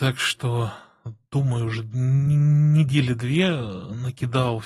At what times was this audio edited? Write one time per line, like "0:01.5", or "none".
none

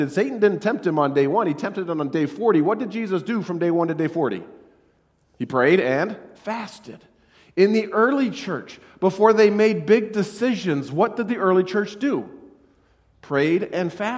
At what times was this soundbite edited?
0:06.3

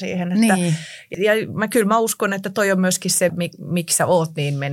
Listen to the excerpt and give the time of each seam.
0:01.1
0:03.3

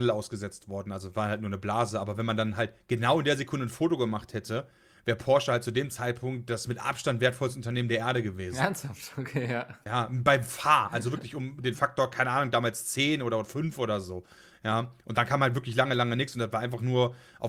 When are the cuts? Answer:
none

